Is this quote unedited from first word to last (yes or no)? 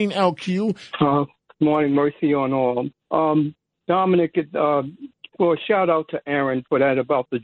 no